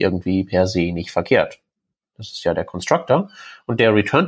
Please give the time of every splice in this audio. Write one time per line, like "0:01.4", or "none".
0:02.1